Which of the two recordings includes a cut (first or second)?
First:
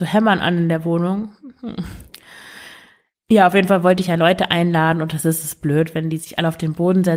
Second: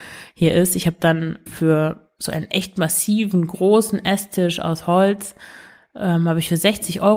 second